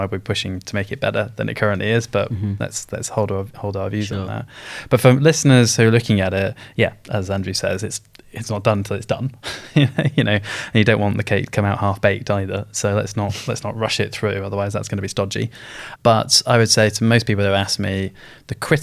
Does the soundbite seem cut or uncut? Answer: uncut